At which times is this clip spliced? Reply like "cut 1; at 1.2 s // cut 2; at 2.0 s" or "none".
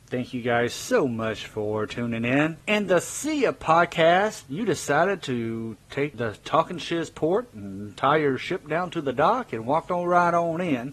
none